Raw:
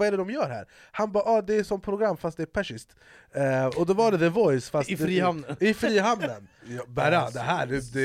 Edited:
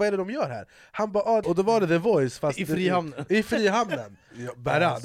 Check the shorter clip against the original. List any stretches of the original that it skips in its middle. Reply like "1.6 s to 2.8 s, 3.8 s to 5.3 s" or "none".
1.4 s to 3.7 s